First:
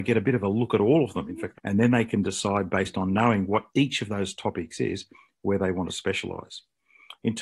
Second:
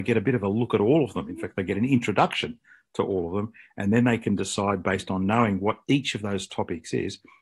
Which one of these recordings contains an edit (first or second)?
first